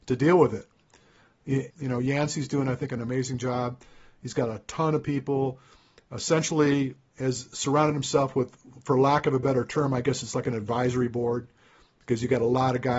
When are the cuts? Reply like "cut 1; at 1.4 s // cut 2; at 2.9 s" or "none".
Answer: cut 1; at 1.7 s